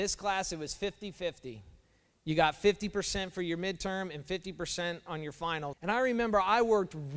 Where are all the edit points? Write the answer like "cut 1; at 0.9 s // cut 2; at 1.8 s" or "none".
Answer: cut 1; at 5.7 s